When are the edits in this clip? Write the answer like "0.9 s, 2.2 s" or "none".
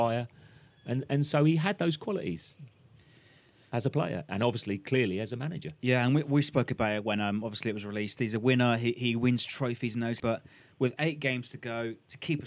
10.2 s